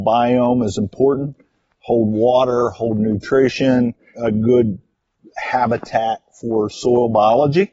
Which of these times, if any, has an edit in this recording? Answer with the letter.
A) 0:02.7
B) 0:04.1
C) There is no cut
B